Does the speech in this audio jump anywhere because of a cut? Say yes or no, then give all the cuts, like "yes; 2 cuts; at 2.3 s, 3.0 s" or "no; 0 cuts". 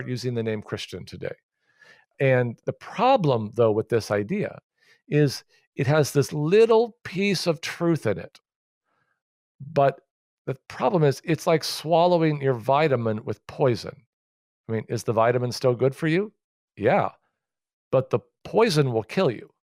no; 0 cuts